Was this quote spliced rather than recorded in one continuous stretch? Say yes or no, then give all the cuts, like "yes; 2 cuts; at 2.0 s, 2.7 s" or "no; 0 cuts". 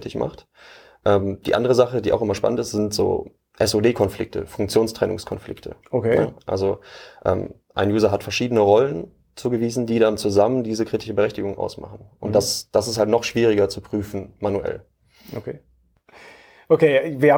no; 0 cuts